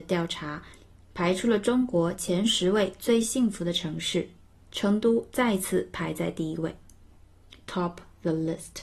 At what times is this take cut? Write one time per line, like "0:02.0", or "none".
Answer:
none